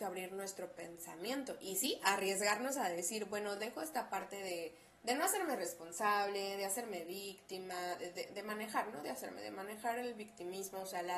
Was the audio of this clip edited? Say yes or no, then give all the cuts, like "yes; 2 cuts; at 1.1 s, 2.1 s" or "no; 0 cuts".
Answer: no; 0 cuts